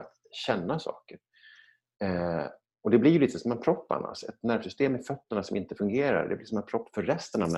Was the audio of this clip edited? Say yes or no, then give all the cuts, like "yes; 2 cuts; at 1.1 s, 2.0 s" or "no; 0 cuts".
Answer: no; 0 cuts